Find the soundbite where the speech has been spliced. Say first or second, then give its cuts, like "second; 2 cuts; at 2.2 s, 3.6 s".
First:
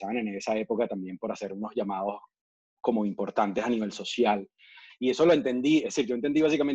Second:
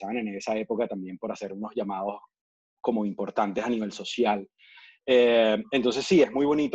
first; 1 cut; at 4.9 s